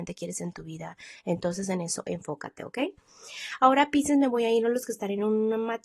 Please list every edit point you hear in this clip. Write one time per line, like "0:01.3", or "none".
none